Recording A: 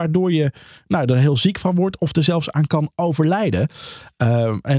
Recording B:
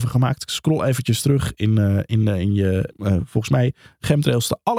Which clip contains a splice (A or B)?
B